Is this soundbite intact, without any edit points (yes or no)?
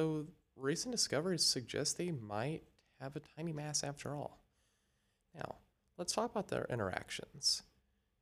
yes